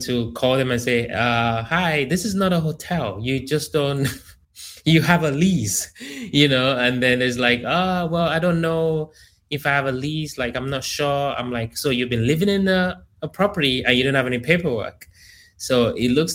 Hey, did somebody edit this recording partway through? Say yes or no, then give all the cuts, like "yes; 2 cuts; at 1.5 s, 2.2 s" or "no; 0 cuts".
no; 0 cuts